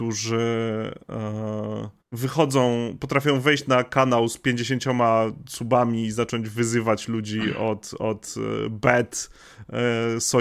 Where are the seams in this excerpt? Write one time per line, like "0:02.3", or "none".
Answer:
0:02.0